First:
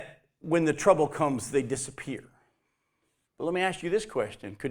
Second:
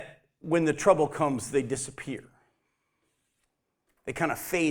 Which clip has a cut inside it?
first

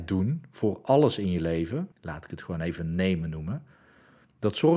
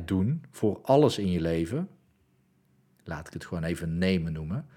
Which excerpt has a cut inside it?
first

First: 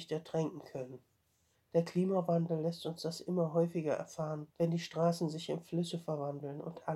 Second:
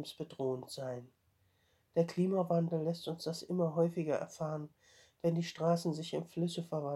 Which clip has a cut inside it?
first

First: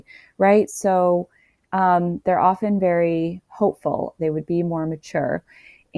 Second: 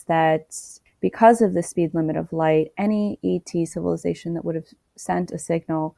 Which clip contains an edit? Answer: first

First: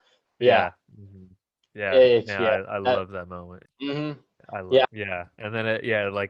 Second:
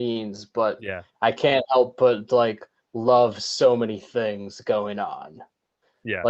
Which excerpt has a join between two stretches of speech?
first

